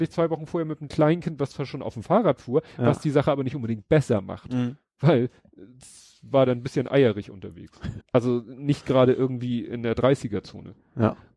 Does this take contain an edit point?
yes; 1 cut; at 8.0 s

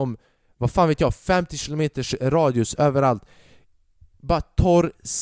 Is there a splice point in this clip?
no; 0 cuts

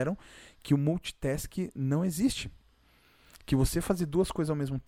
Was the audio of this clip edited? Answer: no; 0 cuts

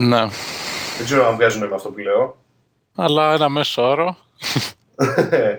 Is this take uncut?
no; 1 cut; at 2.9 s

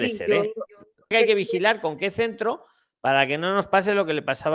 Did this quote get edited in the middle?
yes; 1 cut; at 1.1 s

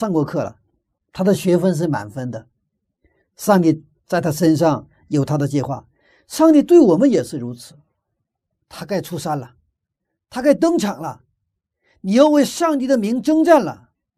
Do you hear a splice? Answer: yes; 1 cut; at 8.6 s

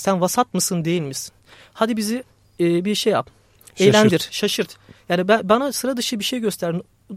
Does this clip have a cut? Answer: no; 0 cuts

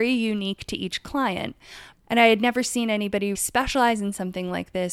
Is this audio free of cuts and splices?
no; 2 cuts; at 1.9 s, 3.3 s

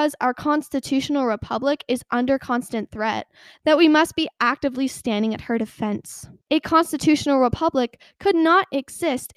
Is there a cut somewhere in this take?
yes; 1 cut; at 6.4 s

